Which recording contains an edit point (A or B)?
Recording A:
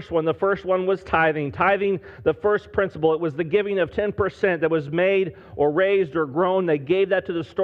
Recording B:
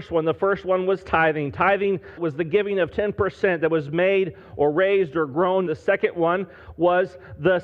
B